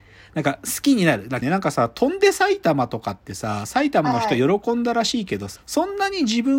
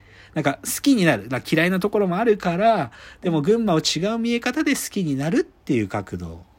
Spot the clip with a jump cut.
first; 2 cuts; at 1.4 s, 5.6 s

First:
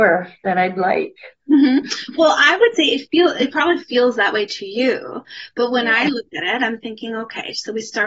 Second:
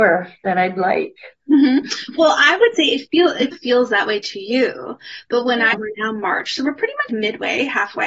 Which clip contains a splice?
second; 3 cuts; at 3.5 s, 5.7 s, 7.1 s

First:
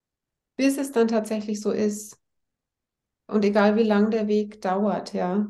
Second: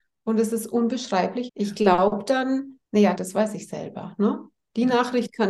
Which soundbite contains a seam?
second; 2 cuts; at 1.5 s, 3.1 s

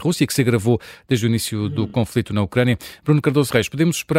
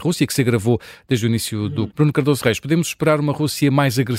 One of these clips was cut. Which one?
second; 1 cut; at 1.9 s

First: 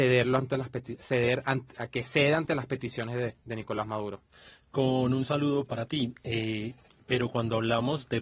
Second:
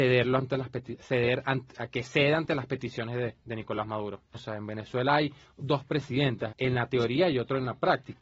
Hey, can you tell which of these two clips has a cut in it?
second; 2 cuts; at 4.3 s, 6.5 s

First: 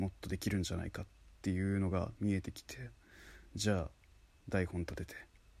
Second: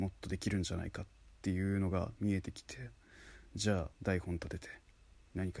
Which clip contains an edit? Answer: second; 1 cut; at 3.9 s

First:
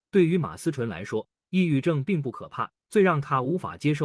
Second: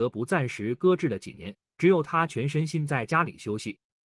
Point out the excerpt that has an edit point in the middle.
second; 1 cut; at 1.7 s

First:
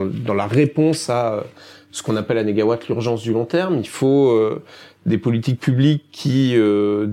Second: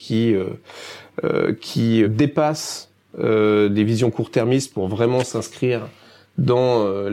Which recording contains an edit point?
second; 1 cut; at 2.0 s

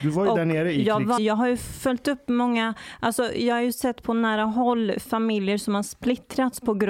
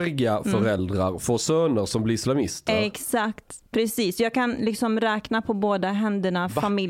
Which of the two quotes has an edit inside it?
first; 1 cut; at 1.2 s

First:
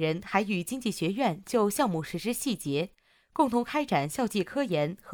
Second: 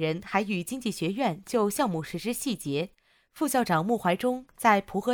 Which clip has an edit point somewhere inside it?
second; 1 cut; at 3.2 s

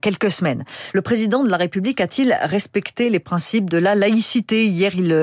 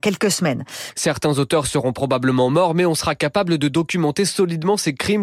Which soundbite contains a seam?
second; 1 cut; at 0.9 s

